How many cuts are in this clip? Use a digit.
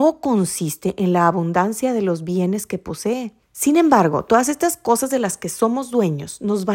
1